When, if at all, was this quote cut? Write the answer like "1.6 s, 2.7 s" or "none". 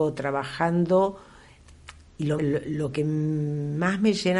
2.4 s